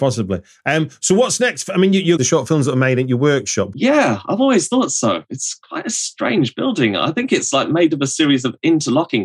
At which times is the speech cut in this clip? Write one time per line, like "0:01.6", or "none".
0:02.2
0:03.7